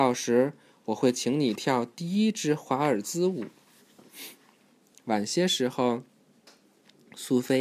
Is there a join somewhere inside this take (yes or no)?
no